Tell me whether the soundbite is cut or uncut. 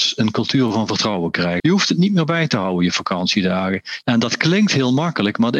cut